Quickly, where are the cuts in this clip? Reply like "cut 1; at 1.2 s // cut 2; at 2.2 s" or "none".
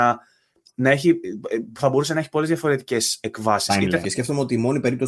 cut 1; at 4.0 s